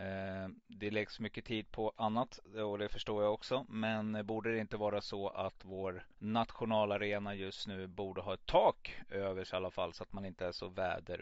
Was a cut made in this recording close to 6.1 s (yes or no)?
yes